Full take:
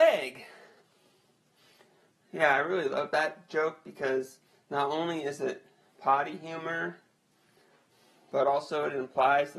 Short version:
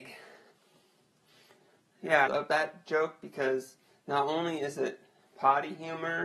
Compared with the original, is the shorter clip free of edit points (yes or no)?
no